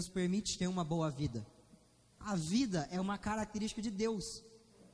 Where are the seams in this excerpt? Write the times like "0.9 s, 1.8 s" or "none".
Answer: 2.1 s

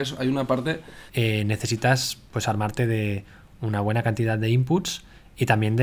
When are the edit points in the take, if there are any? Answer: 1.1 s

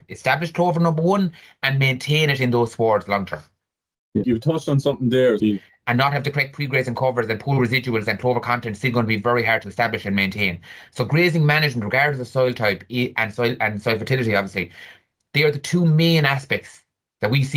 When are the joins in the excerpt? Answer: 4.2 s, 5.4 s

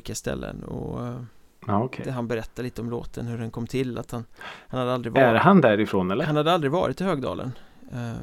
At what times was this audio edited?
none

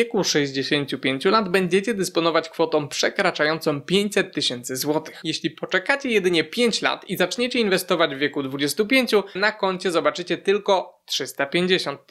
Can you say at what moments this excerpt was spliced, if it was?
9.4 s

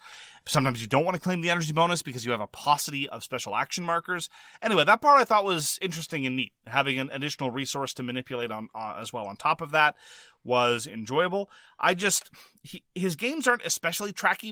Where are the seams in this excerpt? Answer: none

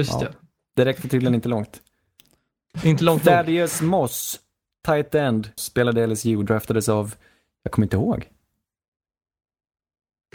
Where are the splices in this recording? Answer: 5.6 s

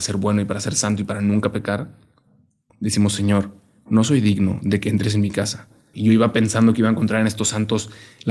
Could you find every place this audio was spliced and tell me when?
2.7 s, 5.9 s

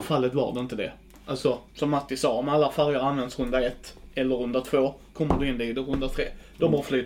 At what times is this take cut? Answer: 1.7 s, 5.1 s

